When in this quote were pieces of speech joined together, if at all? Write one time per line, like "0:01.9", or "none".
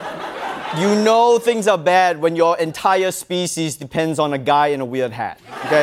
none